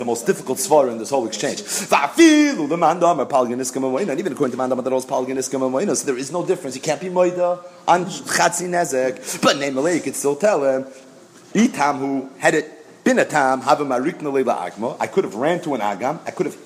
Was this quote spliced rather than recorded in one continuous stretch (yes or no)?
no